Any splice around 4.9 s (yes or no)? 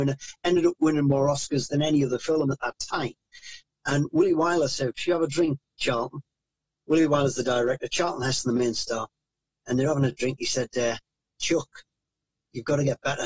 no